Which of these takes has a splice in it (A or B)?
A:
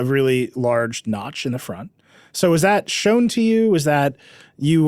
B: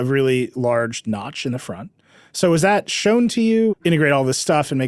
B